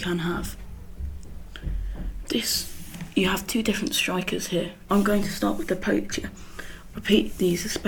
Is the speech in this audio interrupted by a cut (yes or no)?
yes